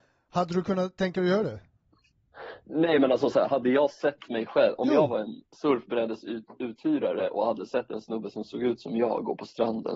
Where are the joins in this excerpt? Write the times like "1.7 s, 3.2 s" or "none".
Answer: none